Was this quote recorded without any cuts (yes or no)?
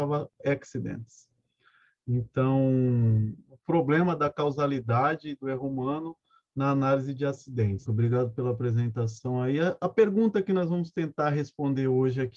no